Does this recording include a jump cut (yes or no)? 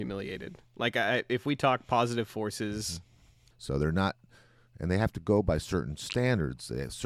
yes